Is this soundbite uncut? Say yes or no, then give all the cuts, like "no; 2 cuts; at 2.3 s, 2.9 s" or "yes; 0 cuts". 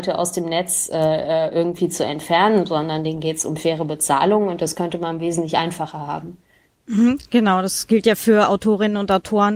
yes; 0 cuts